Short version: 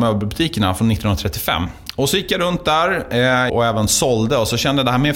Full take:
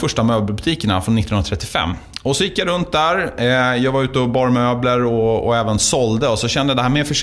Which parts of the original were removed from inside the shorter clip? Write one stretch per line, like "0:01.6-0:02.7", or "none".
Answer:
0:03.8-0:05.4